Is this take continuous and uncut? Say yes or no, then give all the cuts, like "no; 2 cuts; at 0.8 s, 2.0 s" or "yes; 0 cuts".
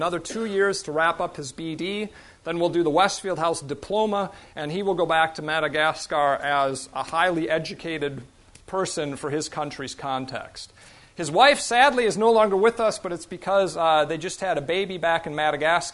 yes; 0 cuts